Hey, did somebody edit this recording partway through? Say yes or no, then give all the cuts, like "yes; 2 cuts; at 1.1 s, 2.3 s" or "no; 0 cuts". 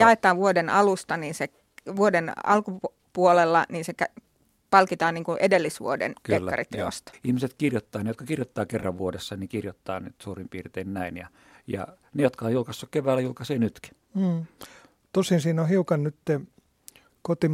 yes; 1 cut; at 7.1 s